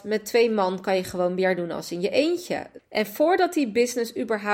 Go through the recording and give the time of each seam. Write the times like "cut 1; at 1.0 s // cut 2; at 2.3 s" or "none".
cut 1; at 2.8 s